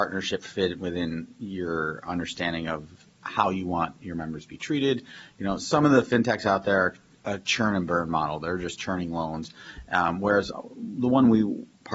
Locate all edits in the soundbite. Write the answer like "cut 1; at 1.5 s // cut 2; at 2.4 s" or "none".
none